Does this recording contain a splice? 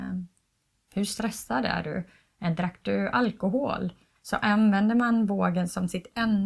yes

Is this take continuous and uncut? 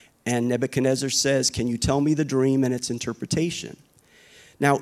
yes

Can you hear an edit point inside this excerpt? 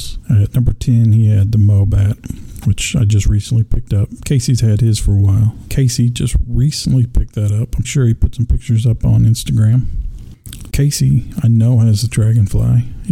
yes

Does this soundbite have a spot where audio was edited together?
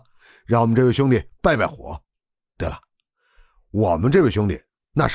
no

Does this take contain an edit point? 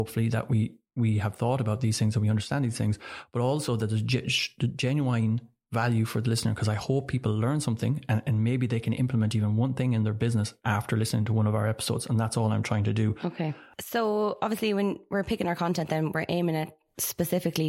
no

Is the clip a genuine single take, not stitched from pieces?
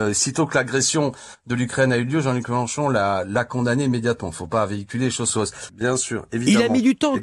no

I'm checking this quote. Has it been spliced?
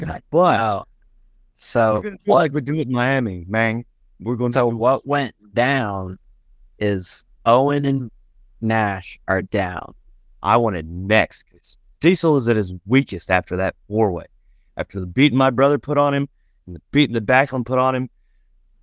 yes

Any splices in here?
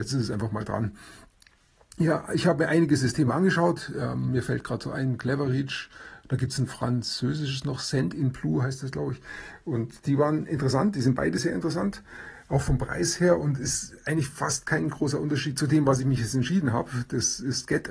no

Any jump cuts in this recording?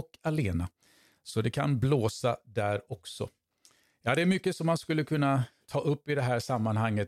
yes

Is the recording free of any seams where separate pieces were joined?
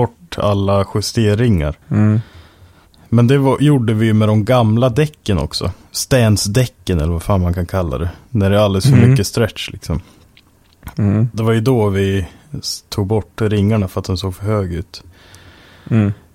no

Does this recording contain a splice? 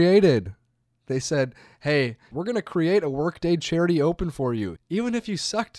yes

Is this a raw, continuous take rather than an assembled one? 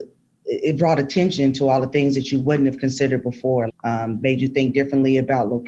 no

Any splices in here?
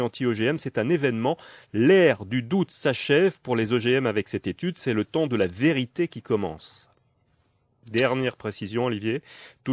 no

